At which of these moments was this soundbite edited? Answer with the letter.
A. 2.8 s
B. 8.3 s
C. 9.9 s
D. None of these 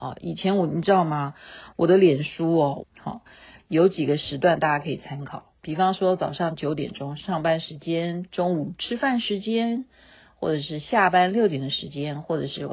A